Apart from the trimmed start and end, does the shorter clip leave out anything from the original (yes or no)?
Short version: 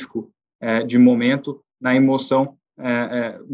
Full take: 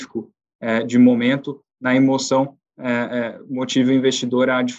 no